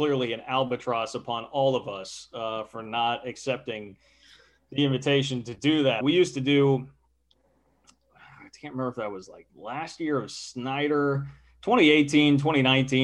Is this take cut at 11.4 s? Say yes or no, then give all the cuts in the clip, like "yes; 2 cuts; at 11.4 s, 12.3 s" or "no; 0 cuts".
no; 2 cuts; at 6.0 s, 9.5 s